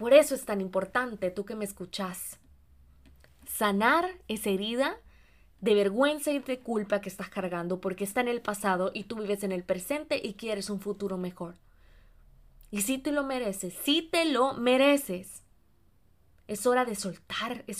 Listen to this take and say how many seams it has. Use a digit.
0